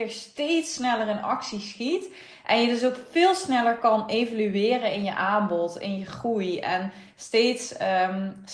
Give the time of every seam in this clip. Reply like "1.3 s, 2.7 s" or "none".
none